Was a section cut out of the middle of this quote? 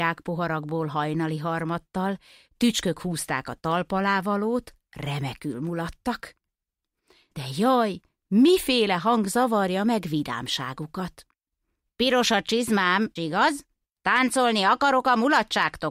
yes; 2 cuts; at 11.8 s, 13.2 s

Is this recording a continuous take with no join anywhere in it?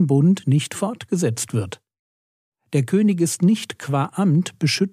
yes; 0 cuts

